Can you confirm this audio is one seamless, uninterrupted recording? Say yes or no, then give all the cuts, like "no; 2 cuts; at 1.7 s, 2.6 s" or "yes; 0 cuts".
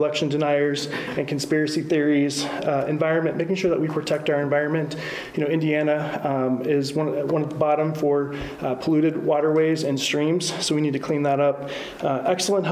yes; 0 cuts